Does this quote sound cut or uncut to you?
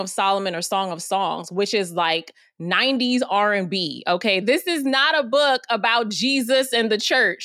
cut